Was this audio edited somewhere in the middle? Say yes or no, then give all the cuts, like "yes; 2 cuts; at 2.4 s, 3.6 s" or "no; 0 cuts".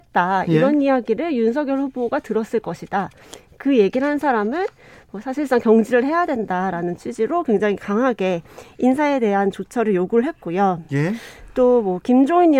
no; 0 cuts